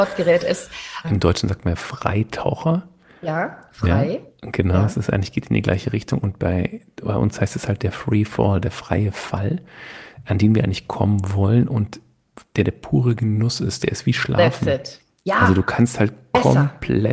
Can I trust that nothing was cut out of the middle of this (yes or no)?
no